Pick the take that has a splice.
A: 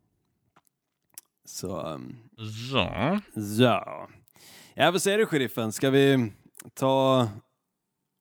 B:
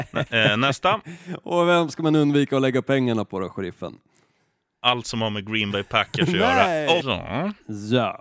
B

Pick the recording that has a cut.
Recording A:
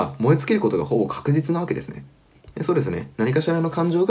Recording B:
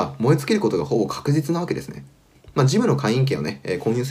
A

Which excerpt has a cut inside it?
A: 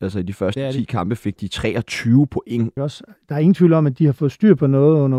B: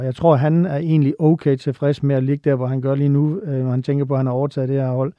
A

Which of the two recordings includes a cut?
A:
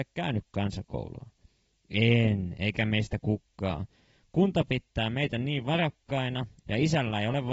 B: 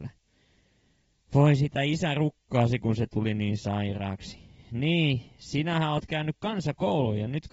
A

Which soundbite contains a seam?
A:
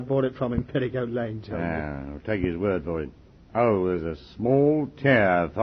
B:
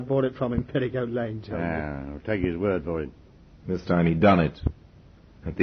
B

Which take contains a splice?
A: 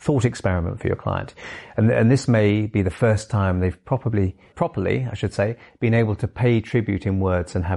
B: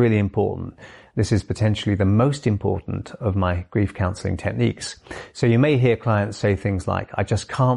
A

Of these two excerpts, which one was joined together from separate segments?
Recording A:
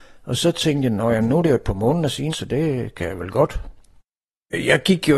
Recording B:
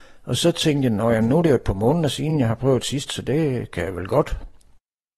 A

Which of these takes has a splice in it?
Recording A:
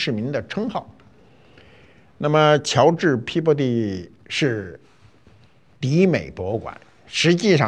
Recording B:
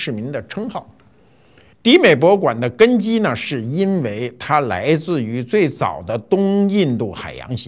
B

